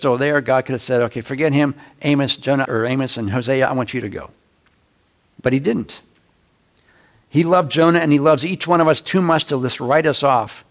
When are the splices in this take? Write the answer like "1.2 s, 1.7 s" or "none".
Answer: 2.6 s